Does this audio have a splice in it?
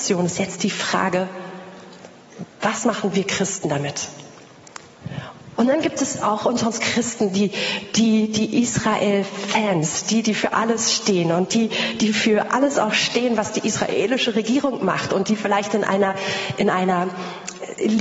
yes; 1 cut; at 5.6 s

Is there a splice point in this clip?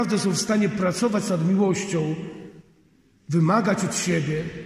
no; 0 cuts

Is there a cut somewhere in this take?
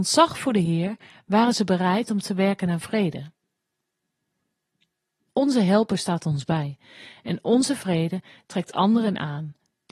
yes; 1 cut; at 5.3 s

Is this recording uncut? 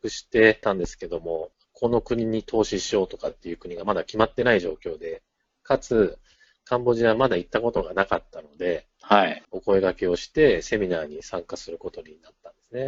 yes; 0 cuts

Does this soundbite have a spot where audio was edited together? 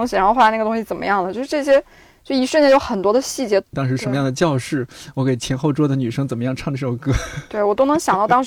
yes; 1 cut; at 3.7 s

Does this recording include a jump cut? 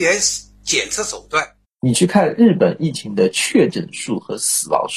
yes; 1 cut; at 1.6 s

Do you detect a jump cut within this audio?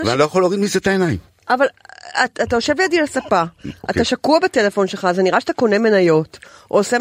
no; 0 cuts

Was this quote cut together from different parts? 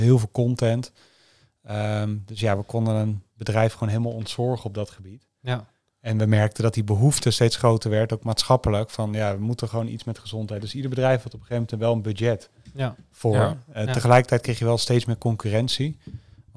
no; 0 cuts

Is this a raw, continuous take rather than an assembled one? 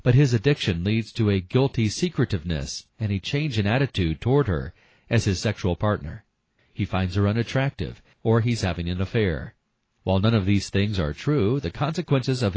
no; 2 cuts; at 6.6 s, 8.1 s

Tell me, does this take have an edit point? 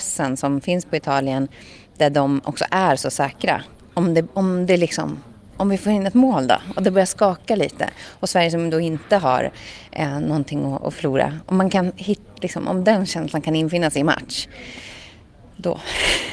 no; 0 cuts

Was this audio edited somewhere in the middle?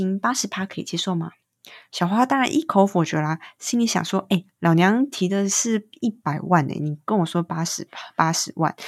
no; 0 cuts

